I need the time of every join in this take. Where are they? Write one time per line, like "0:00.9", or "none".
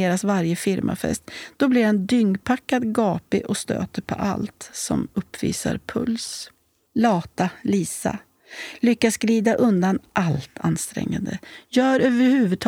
0:06.9

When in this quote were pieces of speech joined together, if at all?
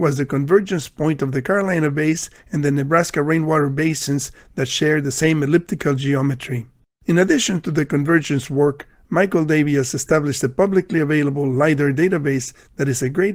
0:06.9

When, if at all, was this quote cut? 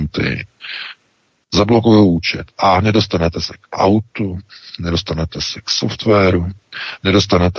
none

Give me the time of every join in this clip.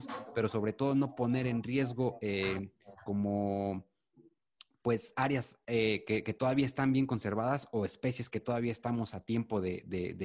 none

